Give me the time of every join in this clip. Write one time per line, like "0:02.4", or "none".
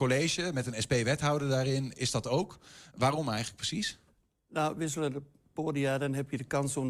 none